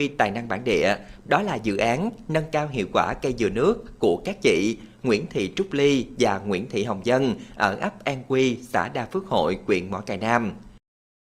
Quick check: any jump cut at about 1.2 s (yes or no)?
yes